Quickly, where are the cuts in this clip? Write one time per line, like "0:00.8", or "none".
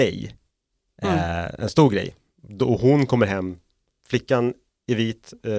none